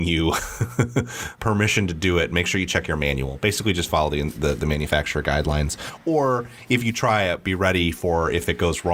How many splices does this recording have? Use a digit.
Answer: 1